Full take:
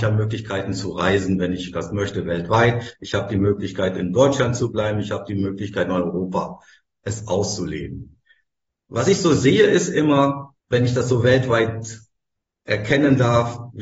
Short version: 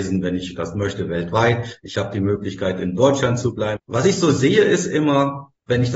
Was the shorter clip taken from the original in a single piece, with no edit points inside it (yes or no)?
no